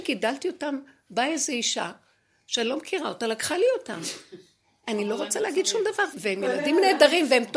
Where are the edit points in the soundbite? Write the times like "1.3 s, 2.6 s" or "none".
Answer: 4.8 s, 6.1 s